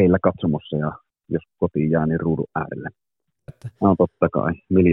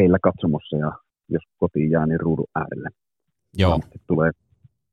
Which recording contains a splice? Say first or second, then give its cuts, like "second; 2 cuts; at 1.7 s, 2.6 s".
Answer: first; 1 cut; at 3.5 s